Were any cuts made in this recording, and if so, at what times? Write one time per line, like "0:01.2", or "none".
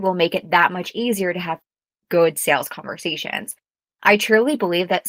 none